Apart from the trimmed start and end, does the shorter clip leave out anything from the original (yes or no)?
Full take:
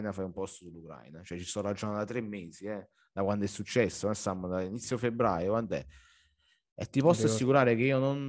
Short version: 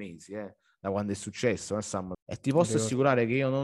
yes